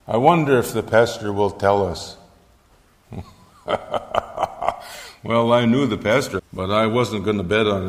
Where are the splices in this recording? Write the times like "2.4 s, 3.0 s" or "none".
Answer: 6.4 s